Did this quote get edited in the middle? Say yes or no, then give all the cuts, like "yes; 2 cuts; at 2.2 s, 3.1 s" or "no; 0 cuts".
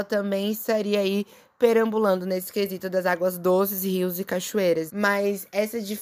yes; 1 cut; at 4.9 s